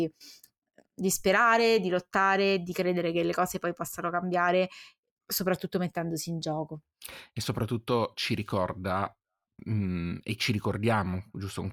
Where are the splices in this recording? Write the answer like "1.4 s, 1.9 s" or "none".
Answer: none